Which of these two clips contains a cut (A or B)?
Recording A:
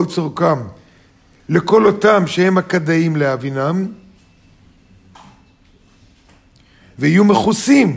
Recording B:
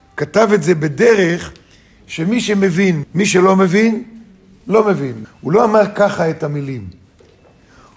B